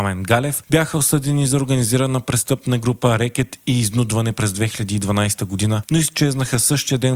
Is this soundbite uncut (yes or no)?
yes